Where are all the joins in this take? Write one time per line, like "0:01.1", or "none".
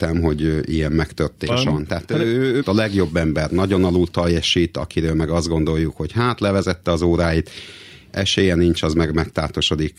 0:01.5
0:02.6